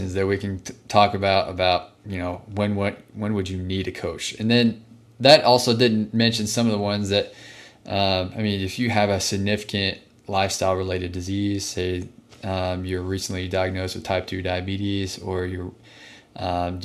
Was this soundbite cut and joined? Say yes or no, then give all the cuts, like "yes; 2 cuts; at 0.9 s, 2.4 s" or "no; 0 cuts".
no; 0 cuts